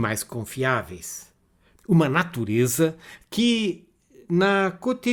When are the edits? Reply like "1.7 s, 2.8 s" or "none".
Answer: 1.8 s